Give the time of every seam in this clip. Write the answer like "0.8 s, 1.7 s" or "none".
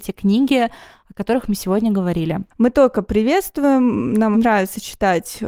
2.5 s, 4.3 s